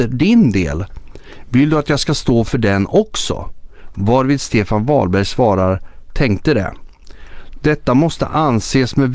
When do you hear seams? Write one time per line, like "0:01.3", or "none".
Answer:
none